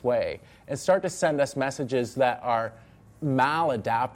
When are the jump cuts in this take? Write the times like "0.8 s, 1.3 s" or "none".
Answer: none